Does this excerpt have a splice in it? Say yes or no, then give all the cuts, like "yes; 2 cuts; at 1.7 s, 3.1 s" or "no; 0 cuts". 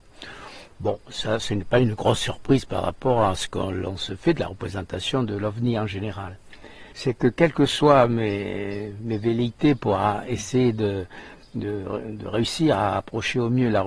yes; 1 cut; at 6.9 s